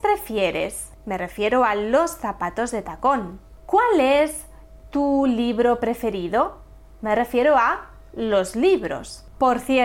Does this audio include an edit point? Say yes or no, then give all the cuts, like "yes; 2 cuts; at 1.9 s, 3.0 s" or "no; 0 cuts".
no; 0 cuts